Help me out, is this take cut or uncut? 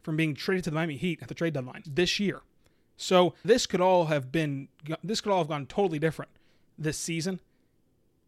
cut